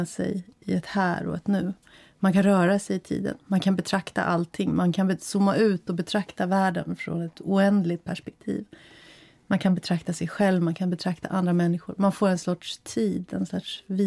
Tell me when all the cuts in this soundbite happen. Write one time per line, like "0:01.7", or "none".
none